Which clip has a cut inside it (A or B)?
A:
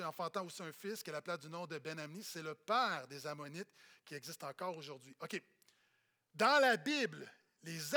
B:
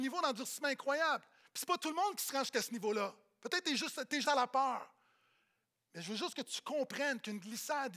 B